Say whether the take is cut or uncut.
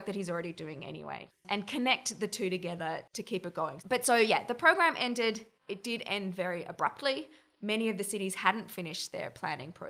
cut